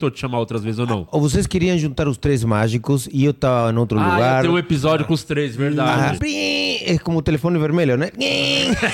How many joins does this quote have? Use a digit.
1